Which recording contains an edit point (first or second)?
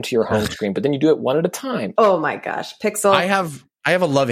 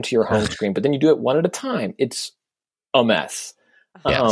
first